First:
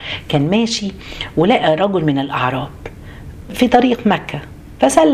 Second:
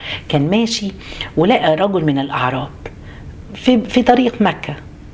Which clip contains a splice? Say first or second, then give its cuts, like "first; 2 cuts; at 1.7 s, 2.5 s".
first; 1 cut; at 3.5 s